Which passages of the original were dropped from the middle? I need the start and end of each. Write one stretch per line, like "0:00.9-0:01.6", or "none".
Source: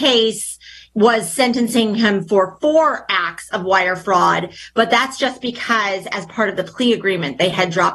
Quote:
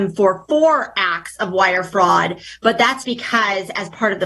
0:05.2-0:05.4